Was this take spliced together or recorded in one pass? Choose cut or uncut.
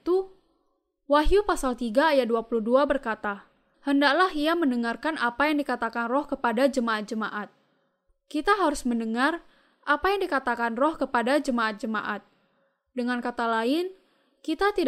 cut